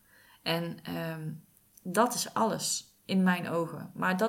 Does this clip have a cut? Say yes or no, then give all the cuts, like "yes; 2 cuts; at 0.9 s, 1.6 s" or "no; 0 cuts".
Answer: no; 0 cuts